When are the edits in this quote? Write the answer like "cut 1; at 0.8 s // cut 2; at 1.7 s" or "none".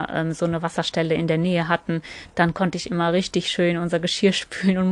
none